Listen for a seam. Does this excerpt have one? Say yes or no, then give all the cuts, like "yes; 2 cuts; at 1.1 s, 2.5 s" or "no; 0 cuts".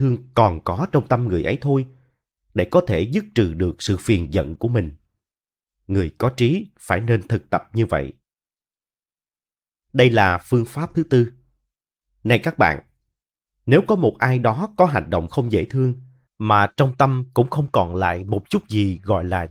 yes; 1 cut; at 16.3 s